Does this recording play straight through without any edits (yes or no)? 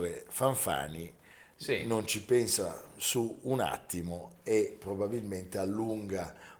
yes